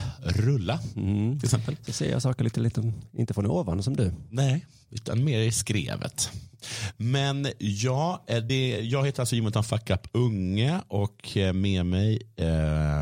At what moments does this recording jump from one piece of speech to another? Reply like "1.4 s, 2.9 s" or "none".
none